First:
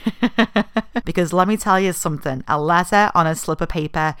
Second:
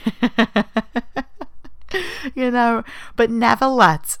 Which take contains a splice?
first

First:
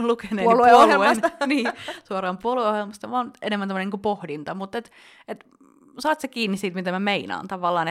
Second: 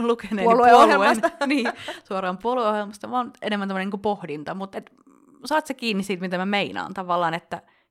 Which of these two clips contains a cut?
second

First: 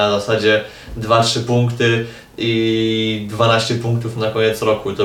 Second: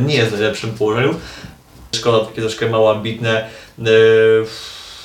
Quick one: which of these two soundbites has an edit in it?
second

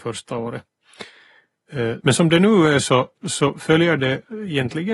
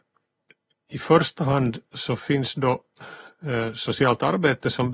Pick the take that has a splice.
first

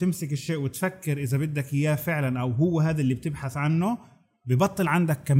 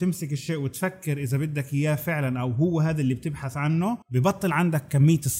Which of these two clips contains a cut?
second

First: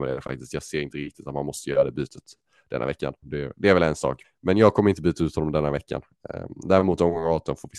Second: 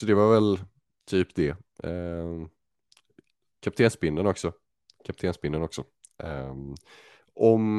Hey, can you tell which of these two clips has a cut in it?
first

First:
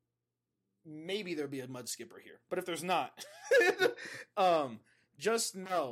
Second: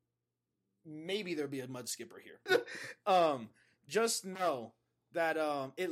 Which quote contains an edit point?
second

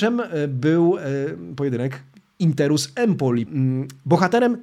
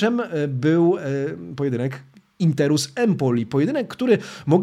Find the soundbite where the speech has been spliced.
first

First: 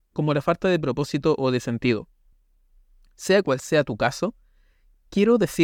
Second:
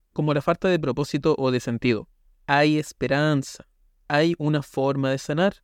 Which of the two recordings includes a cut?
second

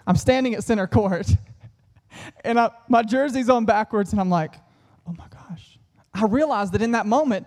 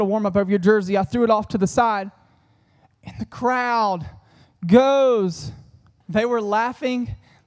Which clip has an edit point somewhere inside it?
second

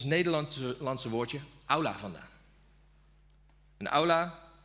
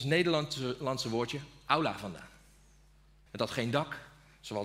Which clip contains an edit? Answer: second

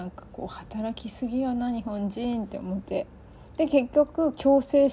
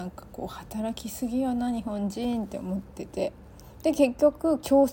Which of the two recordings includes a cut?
first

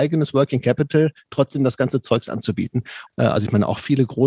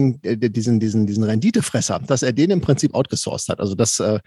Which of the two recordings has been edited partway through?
first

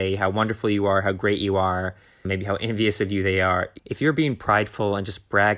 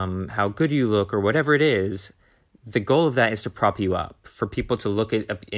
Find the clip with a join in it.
first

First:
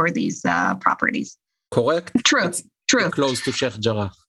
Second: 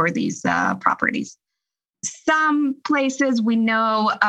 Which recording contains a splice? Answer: first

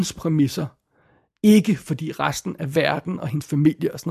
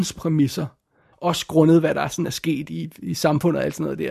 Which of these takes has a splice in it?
second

